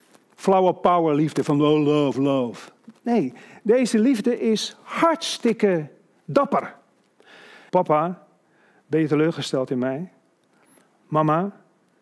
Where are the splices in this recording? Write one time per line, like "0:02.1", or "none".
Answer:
0:02.1
0:07.7